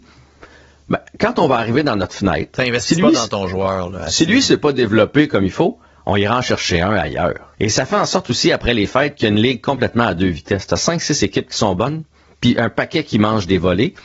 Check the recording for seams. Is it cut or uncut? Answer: cut